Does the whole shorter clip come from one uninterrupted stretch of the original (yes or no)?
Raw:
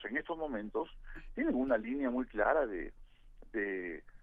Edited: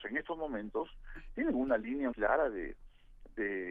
no